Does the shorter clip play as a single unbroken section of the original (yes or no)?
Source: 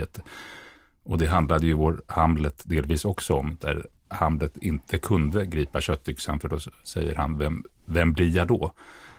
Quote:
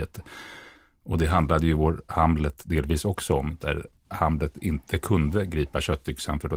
yes